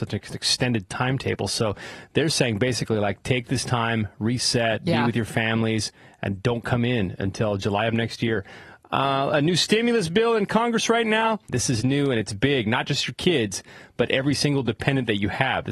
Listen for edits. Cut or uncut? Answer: cut